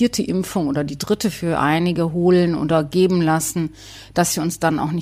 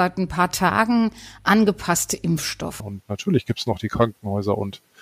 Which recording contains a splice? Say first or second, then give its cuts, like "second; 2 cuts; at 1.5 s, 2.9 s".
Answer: second; 1 cut; at 2.8 s